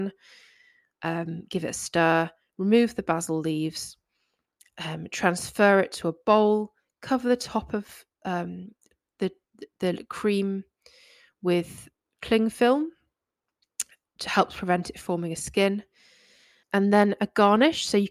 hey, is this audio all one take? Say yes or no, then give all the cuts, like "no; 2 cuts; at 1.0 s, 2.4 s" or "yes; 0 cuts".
no; 1 cut; at 16.6 s